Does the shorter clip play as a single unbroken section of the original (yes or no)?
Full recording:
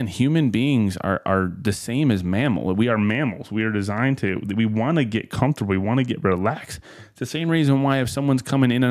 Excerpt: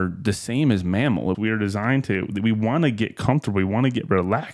no